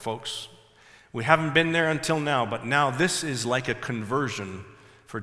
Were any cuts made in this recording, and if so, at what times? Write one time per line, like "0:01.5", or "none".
none